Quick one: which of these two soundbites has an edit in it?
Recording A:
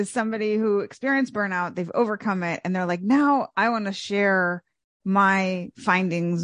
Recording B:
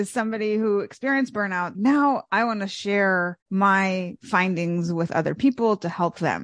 B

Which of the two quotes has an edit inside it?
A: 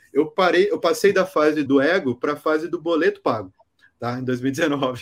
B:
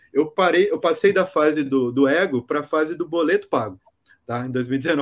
A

